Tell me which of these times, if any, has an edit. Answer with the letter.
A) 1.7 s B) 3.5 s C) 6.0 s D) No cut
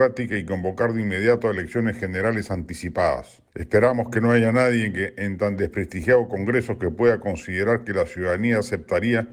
B